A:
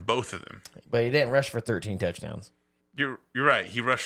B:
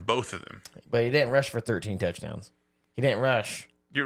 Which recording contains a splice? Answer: A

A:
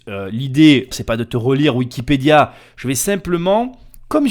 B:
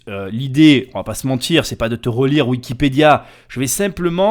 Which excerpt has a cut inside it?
A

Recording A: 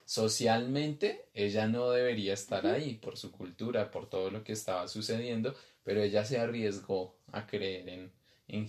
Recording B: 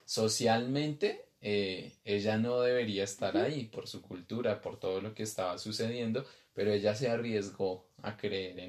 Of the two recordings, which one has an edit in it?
A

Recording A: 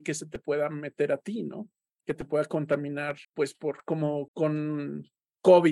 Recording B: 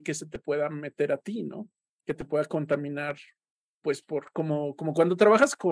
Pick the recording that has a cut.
A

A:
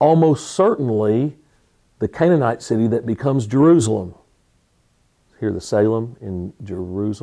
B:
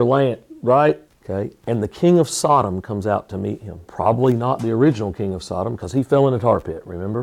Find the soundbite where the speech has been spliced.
B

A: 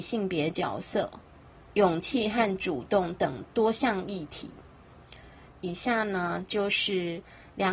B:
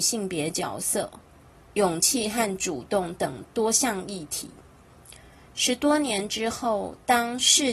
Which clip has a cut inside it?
A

